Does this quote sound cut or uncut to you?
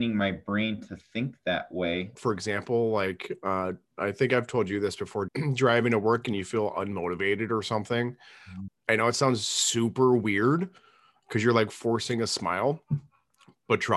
cut